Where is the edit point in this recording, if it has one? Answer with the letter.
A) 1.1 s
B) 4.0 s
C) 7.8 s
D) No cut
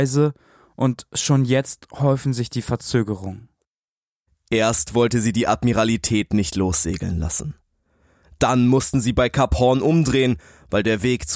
D